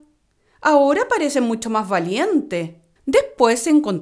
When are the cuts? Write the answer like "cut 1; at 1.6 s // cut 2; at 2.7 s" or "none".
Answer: cut 1; at 3.0 s